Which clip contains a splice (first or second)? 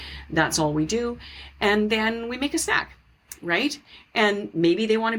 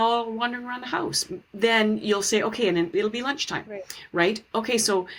second